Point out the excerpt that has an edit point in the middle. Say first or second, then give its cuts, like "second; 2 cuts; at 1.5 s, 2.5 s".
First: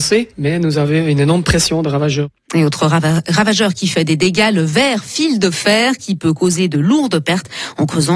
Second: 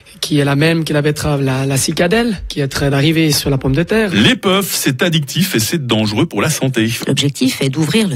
second; 2 cuts; at 4.1 s, 7.0 s